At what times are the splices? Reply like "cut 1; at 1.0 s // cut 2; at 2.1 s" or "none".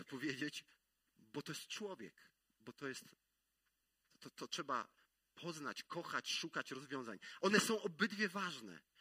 cut 1; at 7.4 s